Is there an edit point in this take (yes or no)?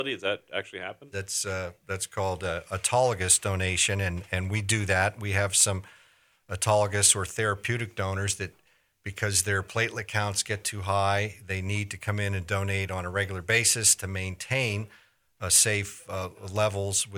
yes